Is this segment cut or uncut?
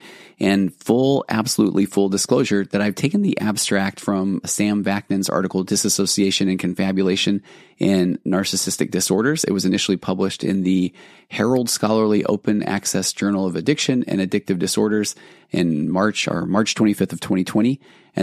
uncut